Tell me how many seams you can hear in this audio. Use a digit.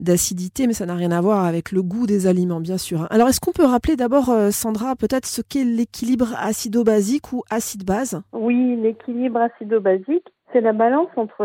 0